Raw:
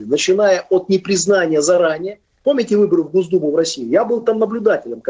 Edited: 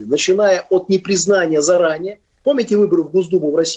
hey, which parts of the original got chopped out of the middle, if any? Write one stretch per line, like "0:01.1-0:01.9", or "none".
none